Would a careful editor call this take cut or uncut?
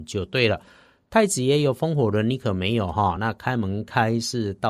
uncut